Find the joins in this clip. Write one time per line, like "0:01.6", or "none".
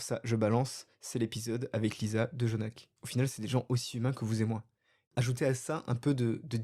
0:03.0
0:05.0